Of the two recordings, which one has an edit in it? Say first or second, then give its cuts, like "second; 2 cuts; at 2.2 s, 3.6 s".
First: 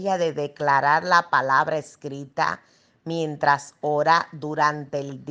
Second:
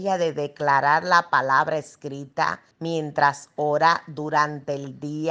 second; 1 cut; at 2.7 s